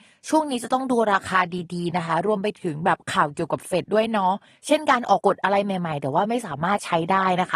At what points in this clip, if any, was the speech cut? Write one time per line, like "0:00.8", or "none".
0:03.8
0:05.2